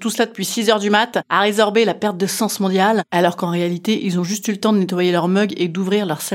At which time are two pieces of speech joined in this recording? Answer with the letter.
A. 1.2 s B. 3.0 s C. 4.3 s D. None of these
D